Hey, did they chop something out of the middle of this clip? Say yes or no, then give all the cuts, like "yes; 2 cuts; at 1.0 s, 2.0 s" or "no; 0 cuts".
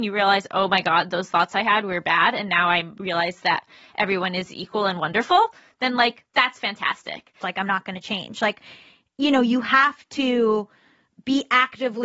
yes; 1 cut; at 7.4 s